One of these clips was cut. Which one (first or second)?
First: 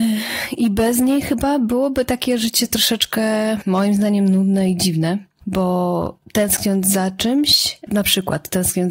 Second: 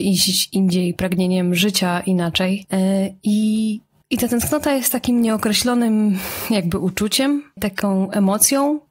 first